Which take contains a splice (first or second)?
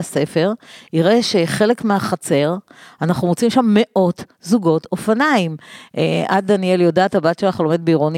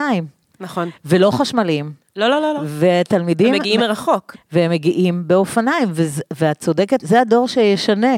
second